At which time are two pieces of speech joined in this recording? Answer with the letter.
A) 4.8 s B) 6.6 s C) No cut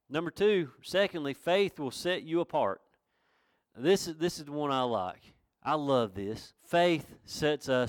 B